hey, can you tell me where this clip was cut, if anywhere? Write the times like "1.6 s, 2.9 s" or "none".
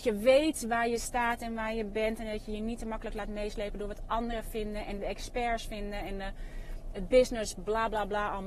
none